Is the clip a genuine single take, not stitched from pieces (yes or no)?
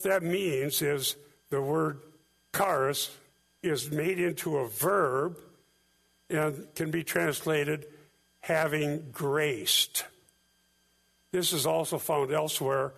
no